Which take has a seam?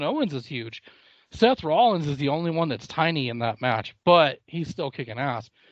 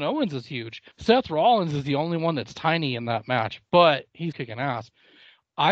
second; 2 cuts; at 0.9 s, 4.3 s

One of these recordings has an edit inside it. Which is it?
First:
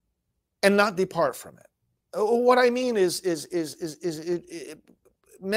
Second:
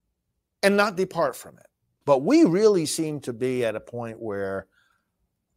second; 1 cut; at 2.0 s

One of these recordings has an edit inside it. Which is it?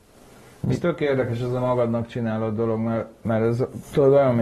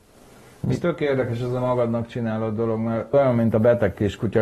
second; 1 cut; at 3.1 s

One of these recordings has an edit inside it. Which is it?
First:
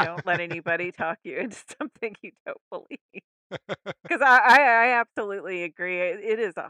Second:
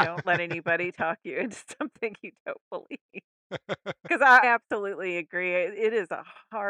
second; 1 cut; at 4.4 s

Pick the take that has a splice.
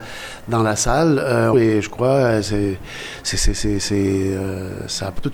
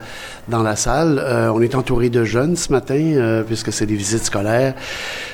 first; 1 cut; at 1.5 s

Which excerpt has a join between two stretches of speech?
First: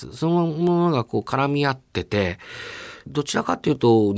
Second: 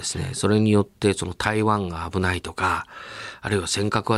first; 1 cut; at 3.1 s

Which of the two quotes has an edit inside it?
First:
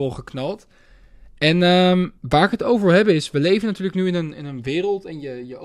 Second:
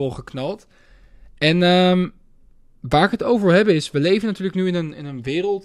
first; 1 cut; at 2.2 s

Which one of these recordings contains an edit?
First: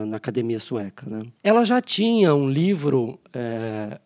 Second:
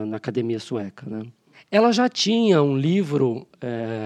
first; 1 cut; at 1.4 s

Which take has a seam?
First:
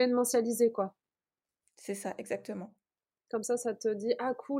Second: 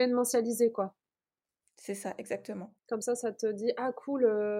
second; 1 cut; at 2.8 s

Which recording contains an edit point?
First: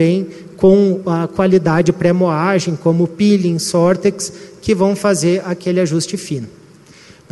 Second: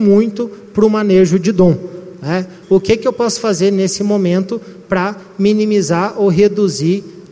second; 1 cut; at 2.6 s

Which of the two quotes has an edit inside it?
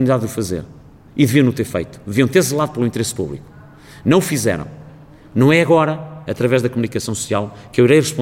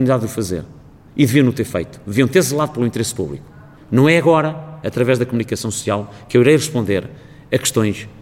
second; 1 cut; at 3.8 s

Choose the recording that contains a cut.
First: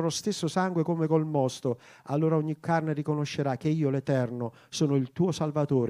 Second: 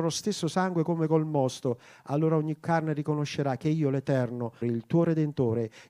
second; 1 cut; at 4.6 s

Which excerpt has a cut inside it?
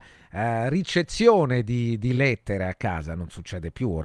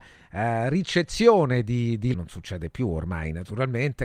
second; 1 cut; at 2.1 s

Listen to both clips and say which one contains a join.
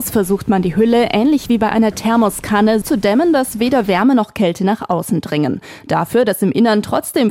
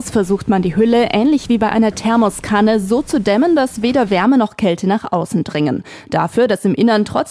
first; 1 cut; at 2.8 s

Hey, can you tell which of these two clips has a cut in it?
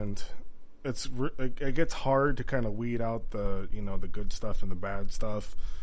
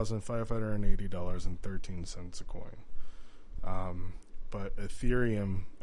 second; 1 cut; at 3.6 s

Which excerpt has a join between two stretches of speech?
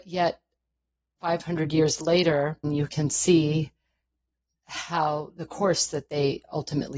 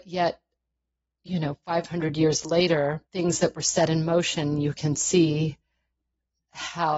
first; 2 cuts; at 1.2 s, 2.6 s

